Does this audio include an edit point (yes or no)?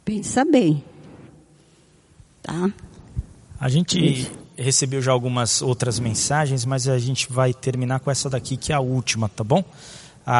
no